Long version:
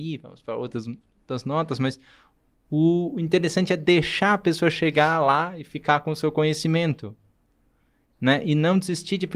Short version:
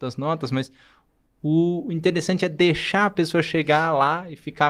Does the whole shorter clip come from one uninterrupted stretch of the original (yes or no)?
yes